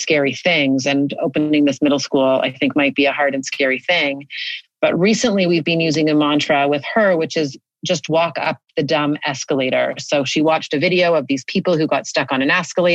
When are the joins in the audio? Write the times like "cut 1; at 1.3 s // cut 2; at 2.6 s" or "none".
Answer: none